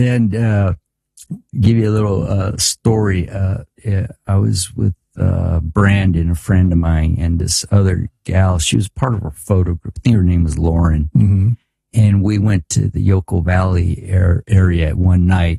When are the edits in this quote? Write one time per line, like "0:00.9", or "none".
0:03.8